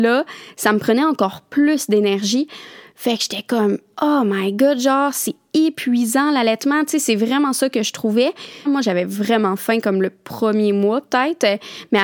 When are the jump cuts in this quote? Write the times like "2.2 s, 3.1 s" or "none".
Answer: 8.7 s